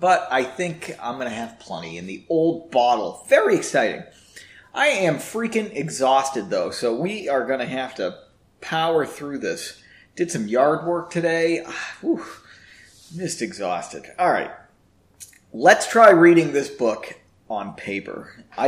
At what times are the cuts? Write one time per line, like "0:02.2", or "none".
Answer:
none